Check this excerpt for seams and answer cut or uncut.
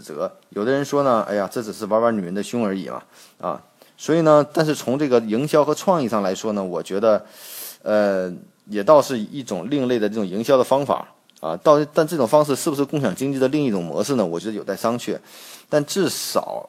uncut